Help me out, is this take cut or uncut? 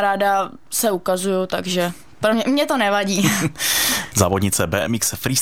uncut